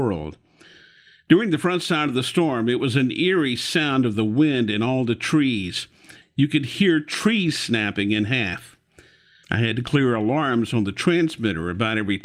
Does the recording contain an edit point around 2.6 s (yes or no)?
no